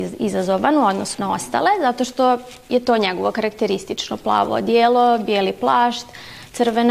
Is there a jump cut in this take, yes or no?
yes